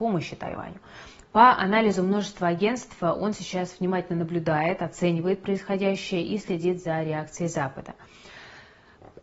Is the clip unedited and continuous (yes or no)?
no